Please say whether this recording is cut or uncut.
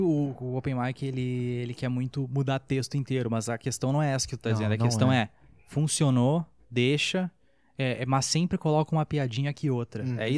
uncut